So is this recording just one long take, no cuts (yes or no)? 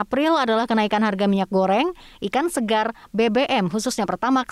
no